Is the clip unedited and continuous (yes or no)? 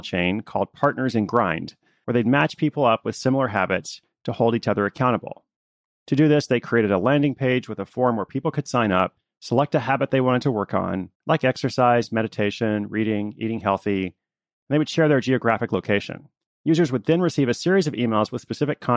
no